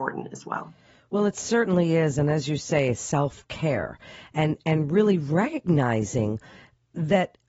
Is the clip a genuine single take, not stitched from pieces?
yes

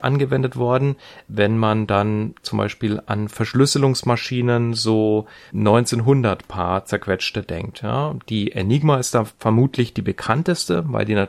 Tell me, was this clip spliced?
yes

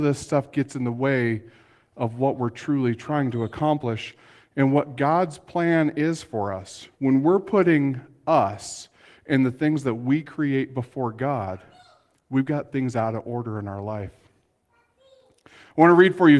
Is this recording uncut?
no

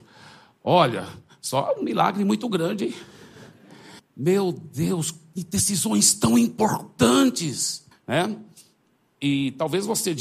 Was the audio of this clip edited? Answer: yes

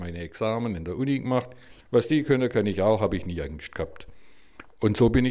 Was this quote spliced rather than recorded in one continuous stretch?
yes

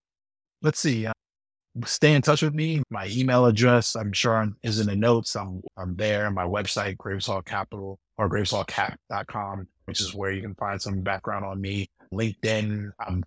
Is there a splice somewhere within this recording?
yes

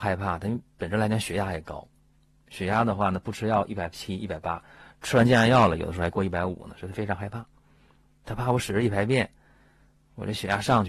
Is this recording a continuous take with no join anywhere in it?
yes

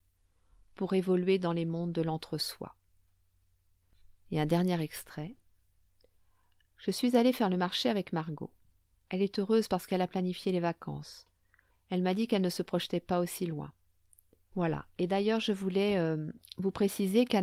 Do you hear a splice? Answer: yes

